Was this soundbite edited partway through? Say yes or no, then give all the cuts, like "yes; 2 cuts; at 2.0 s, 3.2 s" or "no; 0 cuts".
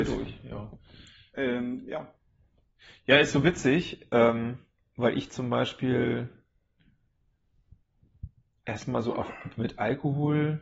no; 0 cuts